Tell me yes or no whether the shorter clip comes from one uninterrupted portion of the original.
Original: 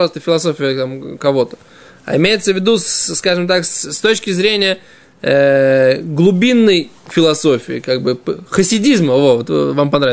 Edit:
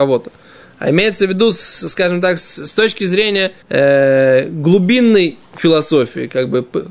no